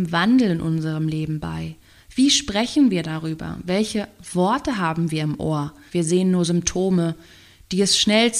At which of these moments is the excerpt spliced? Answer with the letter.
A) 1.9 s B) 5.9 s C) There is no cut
B